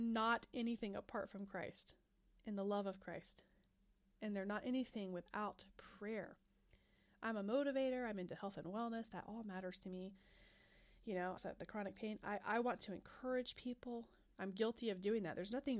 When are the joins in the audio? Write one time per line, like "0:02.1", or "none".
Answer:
0:11.4
0:14.3